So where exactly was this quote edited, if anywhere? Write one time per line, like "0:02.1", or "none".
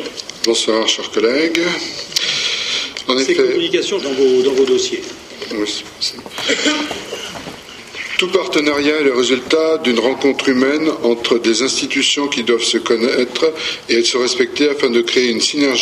0:04.0